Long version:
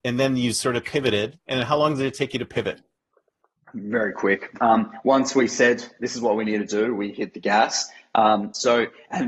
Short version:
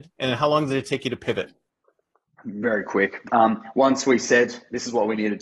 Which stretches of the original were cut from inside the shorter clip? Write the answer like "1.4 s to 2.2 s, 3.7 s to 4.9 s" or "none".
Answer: none